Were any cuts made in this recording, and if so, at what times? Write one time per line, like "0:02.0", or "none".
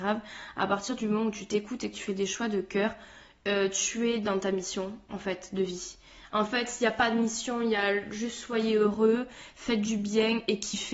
0:06.3